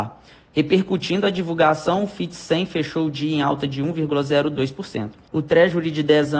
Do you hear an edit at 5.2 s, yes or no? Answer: yes